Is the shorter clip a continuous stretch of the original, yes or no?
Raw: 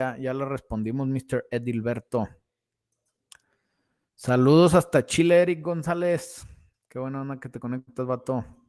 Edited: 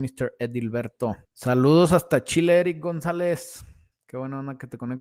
no